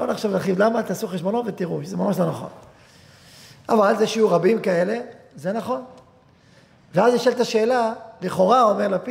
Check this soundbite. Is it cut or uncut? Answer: uncut